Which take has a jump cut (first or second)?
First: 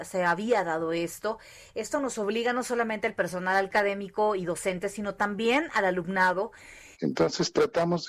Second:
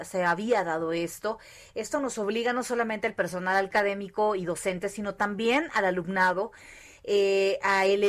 first